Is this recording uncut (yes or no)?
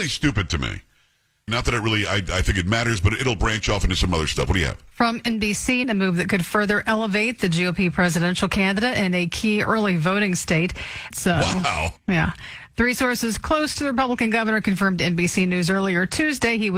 no